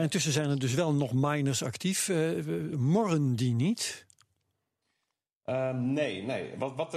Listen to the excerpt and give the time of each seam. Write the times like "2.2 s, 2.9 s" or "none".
none